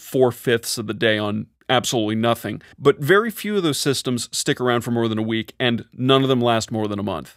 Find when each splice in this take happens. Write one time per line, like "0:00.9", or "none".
0:02.7

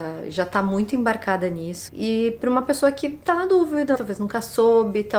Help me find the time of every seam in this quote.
0:01.9
0:04.0

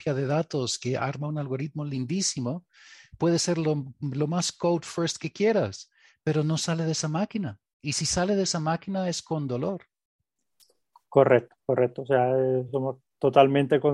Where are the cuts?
none

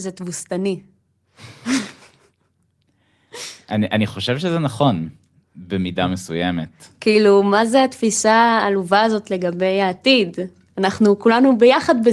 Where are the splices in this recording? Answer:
none

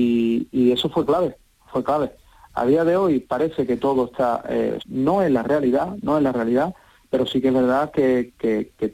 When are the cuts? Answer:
0:04.8

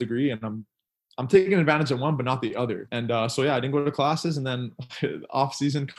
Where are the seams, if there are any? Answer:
0:02.9

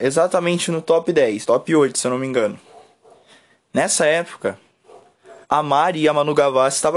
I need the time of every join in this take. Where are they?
0:01.4
0:05.4

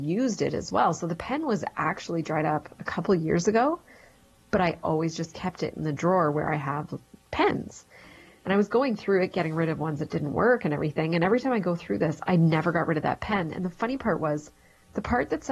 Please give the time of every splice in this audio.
none

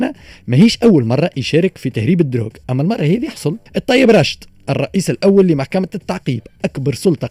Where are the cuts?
0:03.7

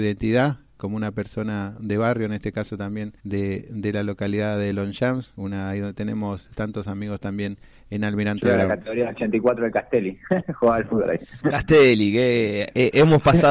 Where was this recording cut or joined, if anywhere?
0:03.2

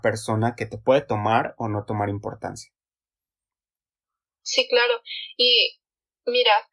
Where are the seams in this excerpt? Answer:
none

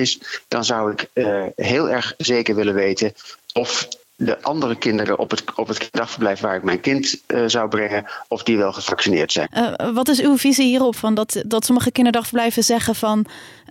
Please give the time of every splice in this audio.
0:09.4

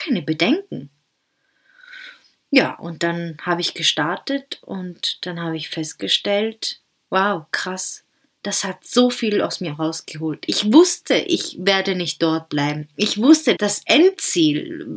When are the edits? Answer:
0:13.6

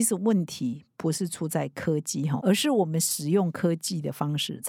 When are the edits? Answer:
0:02.4

